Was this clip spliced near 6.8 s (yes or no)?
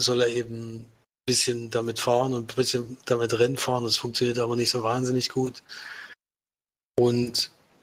yes